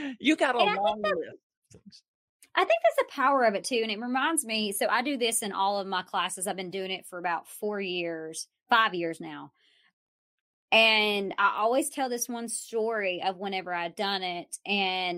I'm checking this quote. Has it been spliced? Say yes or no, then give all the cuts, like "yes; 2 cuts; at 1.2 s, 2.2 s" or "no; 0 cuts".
no; 0 cuts